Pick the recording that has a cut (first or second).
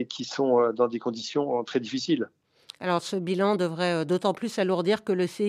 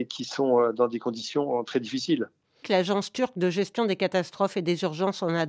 second